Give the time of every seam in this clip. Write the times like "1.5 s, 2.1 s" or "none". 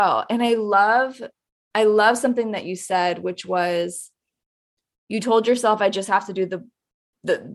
none